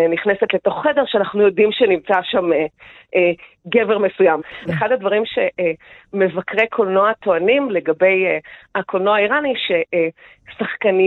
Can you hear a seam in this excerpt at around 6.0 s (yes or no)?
no